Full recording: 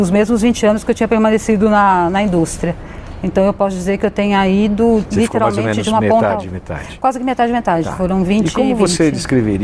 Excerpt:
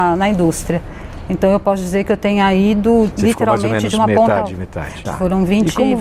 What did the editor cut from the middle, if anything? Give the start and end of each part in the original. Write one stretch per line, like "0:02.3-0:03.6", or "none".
0:07.0-0:07.8